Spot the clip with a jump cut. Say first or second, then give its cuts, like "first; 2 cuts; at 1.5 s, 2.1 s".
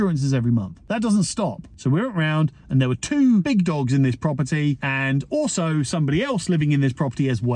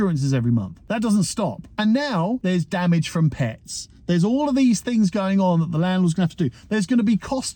first; 1 cut; at 1.7 s